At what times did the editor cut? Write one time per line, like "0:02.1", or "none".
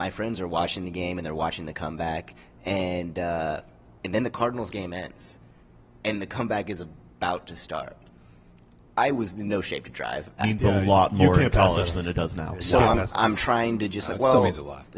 0:10.4